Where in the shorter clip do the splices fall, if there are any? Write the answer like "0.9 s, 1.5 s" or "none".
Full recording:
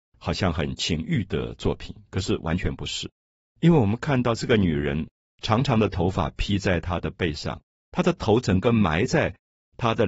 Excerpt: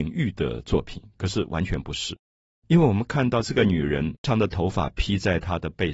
4.2 s